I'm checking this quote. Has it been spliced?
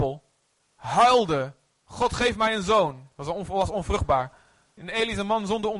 yes; 1 cut; at 4.8 s

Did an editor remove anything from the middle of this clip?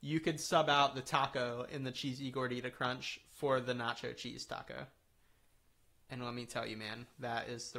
no; 0 cuts

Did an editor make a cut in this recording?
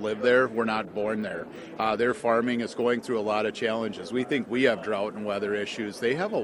yes; 1 cut; at 1.8 s

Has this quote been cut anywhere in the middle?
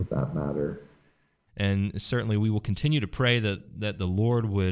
yes; 1 cut; at 1.5 s

